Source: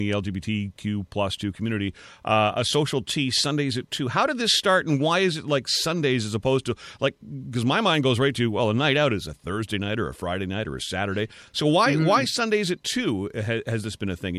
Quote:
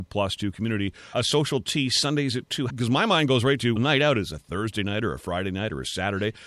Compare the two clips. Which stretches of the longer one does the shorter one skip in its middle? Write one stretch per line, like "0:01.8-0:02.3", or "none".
0:02.1-0:02.5
0:04.1-0:07.4
0:08.5-0:08.7